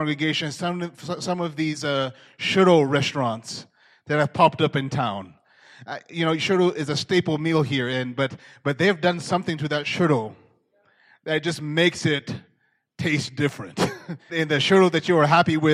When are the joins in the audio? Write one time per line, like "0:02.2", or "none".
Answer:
0:14.2